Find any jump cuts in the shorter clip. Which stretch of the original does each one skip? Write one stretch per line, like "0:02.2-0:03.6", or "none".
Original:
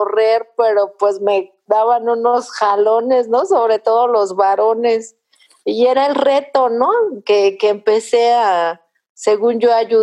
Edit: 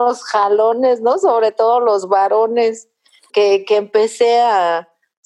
0:05.6-0:07.2